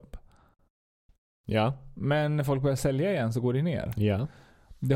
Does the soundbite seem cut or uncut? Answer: uncut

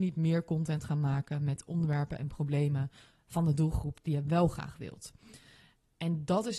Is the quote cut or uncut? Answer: uncut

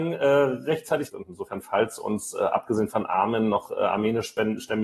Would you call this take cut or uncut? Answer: cut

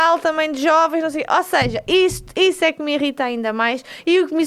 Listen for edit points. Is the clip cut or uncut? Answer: uncut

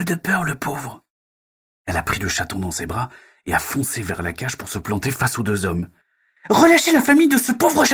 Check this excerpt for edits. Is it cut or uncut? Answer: uncut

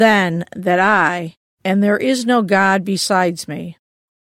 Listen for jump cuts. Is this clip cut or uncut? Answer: cut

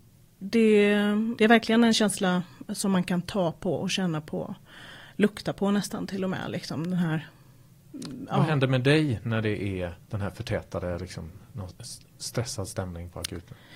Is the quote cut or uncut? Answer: cut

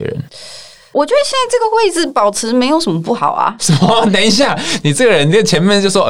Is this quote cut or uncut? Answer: uncut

